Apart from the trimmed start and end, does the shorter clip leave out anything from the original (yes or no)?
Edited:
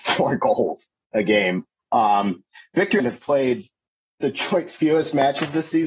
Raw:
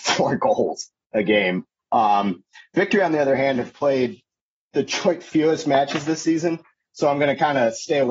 yes